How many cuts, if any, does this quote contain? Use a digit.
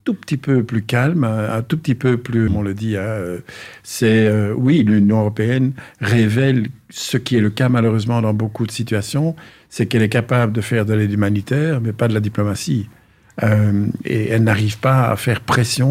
1